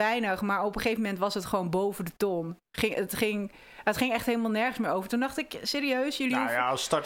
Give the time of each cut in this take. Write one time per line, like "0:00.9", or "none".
none